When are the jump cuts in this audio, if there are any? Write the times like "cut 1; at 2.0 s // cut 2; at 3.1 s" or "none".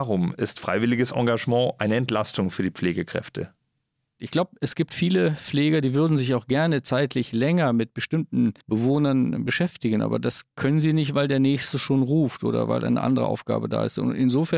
cut 1; at 8.6 s